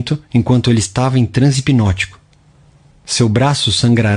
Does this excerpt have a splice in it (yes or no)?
yes